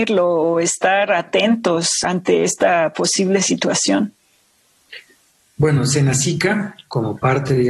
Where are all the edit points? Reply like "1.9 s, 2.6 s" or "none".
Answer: 2.0 s